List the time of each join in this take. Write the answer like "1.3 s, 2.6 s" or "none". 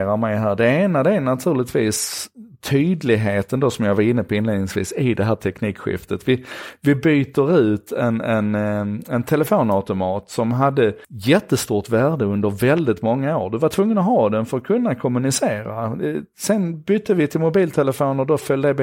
11.0 s